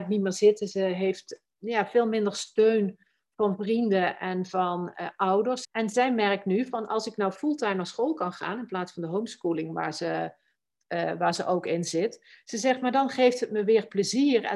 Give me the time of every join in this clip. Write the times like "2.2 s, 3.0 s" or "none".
5.6 s